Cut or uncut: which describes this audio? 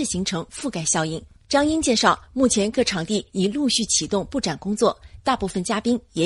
uncut